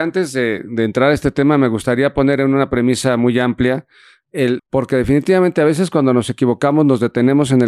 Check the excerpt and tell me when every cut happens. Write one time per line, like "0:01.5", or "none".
0:04.6